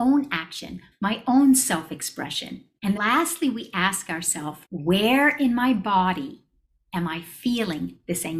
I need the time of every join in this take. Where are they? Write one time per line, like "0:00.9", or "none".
0:00.9
0:03.0
0:04.6